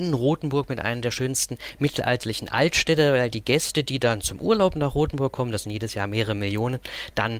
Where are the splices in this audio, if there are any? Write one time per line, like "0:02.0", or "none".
none